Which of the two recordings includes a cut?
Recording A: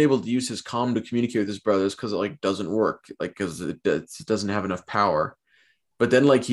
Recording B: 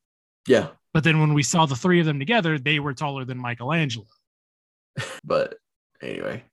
B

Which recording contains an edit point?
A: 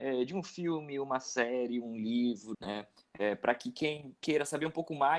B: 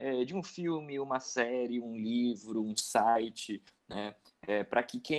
A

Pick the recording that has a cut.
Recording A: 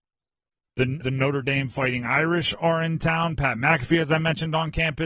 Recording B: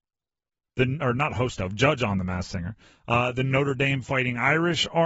A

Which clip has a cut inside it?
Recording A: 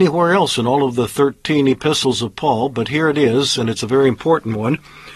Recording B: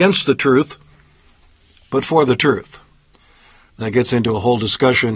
B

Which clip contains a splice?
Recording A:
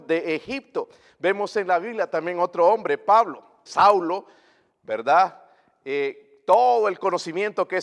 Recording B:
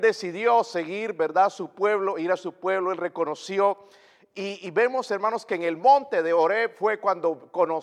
A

